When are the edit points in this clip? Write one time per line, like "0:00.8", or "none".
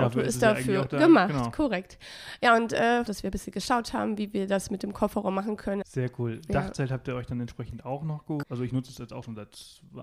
0:03.1
0:05.8
0:08.4

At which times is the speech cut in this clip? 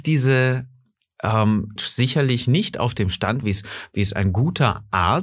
0:01.8
0:03.4

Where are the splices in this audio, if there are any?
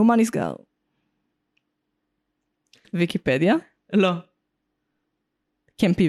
0:02.8

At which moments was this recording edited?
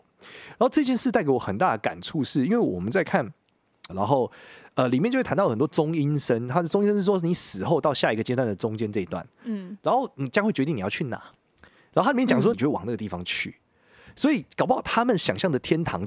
0:03.9
0:12.5

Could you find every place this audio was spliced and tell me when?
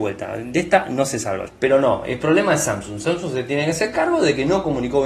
0:01.5

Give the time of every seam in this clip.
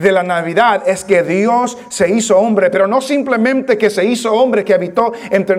none

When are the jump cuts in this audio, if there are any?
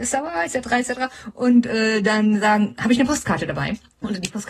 none

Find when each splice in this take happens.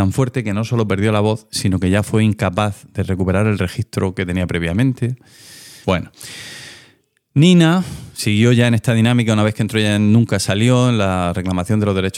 0:05.8

